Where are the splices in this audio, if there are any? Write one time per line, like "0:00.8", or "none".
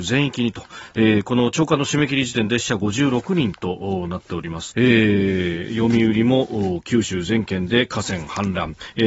0:04.7